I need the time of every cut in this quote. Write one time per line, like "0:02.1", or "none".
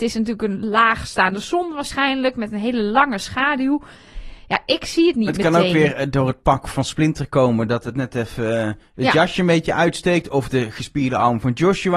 none